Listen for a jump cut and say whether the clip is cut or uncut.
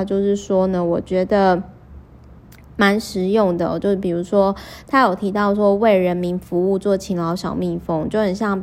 uncut